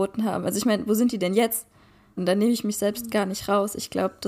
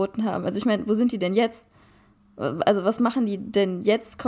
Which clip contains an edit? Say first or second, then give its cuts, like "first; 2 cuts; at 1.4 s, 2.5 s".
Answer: first; 1 cut; at 2.2 s